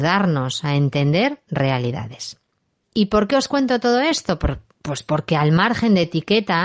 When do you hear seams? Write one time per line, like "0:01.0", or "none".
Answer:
0:02.8

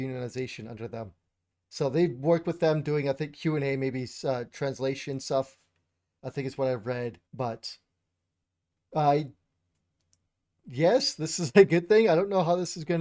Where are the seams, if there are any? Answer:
0:07.3

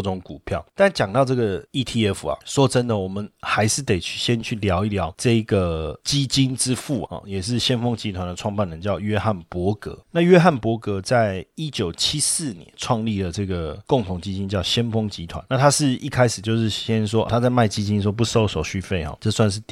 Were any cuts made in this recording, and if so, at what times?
0:07.1
0:17.3

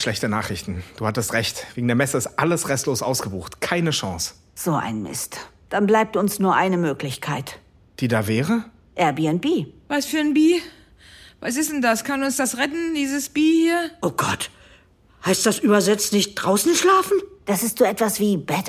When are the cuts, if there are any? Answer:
none

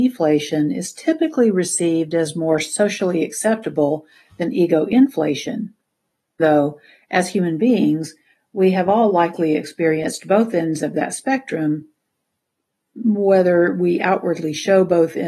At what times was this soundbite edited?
0:06.4

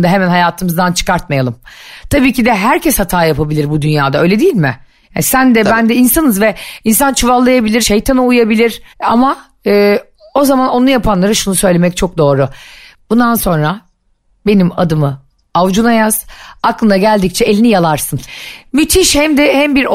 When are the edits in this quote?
0:07.8
0:08.9
0:18.3

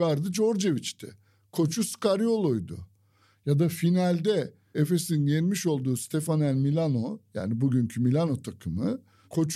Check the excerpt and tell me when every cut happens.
none

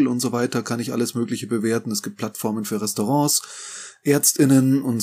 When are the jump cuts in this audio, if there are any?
none

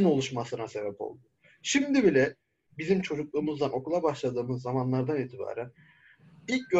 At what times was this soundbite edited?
none

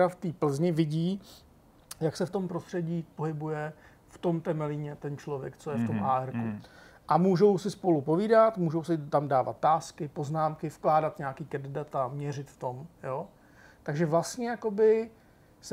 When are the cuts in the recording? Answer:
none

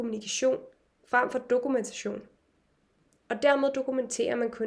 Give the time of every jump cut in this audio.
none

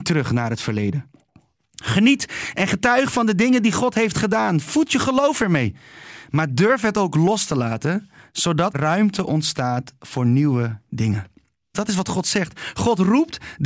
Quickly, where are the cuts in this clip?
0:08.7
0:11.7

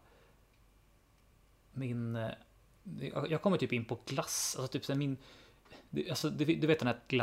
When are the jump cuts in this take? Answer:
none

